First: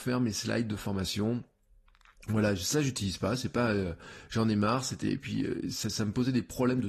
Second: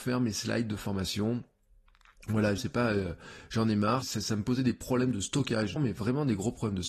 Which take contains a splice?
second; 3 cuts; at 2.6 s, 4.0 s, 5.8 s

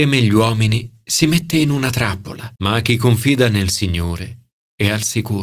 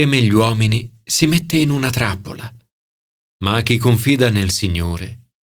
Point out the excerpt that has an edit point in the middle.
first; 1 cut; at 2.6 s

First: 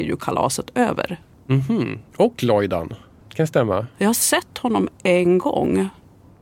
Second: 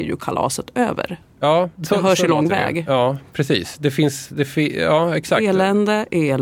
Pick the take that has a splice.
first; 2 cuts; at 1.3 s, 3.2 s

